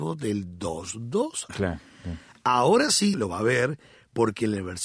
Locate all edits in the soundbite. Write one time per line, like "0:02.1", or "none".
0:01.5
0:03.1

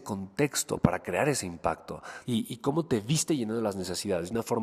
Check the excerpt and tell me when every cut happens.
0:02.2

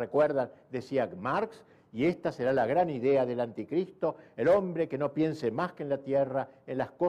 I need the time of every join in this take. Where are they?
none

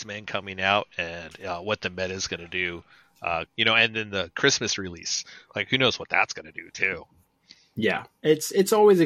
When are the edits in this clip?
0:03.5

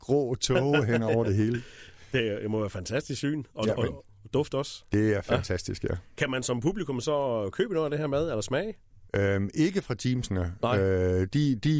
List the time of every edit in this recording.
0:09.1

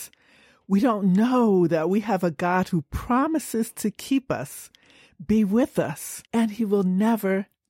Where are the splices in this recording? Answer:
0:06.3

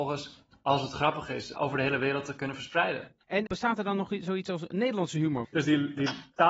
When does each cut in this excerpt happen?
0:01.5
0:03.5
0:05.4

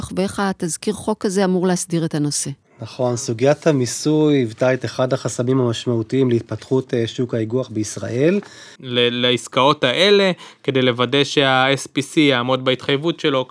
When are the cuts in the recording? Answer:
0:08.8

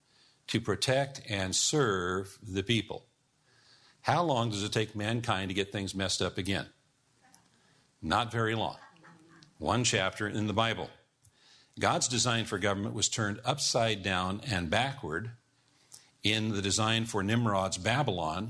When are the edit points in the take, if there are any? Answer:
none

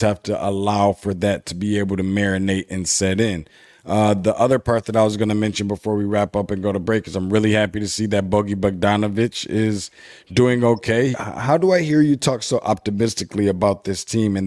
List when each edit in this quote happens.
0:11.1

